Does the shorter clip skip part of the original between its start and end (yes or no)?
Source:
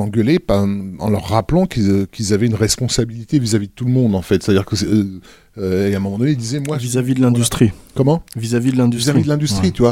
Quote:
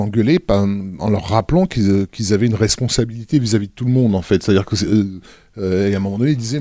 no